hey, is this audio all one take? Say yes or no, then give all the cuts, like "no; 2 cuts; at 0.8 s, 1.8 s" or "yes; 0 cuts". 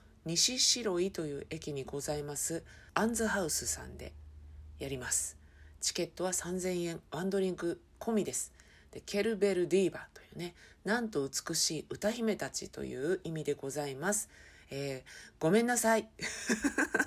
yes; 0 cuts